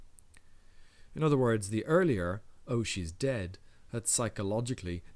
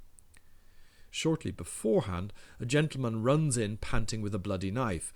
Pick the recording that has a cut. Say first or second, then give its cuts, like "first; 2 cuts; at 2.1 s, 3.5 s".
second; 1 cut; at 1.1 s